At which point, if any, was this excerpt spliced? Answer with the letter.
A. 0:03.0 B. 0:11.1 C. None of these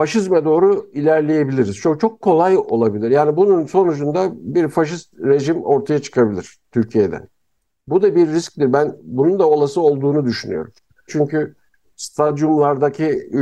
B